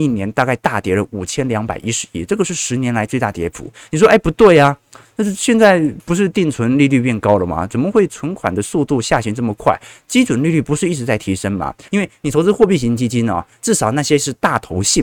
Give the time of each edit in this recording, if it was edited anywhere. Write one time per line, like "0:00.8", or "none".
0:11.9